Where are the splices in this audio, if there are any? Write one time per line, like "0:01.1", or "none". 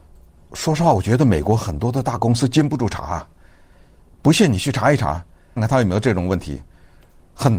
0:05.6